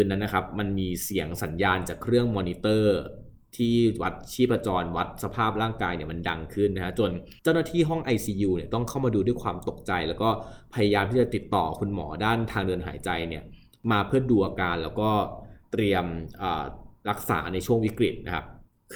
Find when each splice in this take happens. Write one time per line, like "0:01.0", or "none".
0:07.4